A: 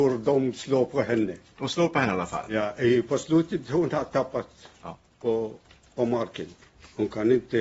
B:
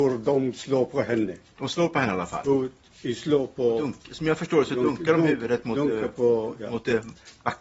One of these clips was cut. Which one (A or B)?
B